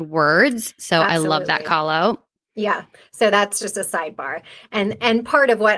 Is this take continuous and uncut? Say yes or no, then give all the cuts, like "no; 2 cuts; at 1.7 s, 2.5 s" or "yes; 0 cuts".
yes; 0 cuts